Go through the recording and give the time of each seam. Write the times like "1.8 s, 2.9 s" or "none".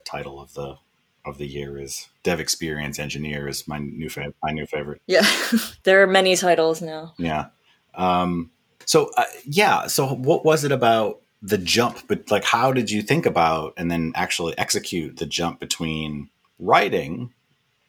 none